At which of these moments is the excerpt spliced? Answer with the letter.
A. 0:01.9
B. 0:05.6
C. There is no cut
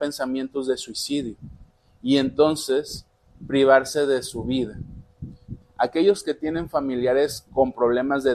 B